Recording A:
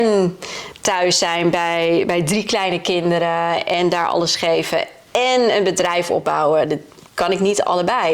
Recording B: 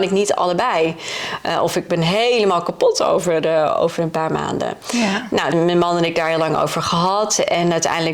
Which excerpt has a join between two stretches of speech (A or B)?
B